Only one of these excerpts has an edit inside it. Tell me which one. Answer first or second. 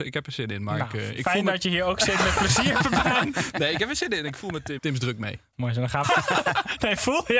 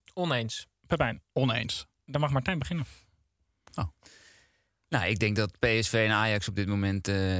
first